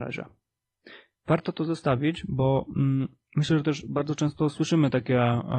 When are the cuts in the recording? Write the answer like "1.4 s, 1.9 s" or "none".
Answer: none